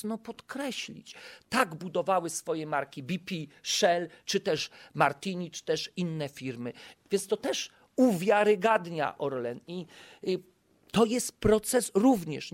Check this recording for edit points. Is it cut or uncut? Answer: cut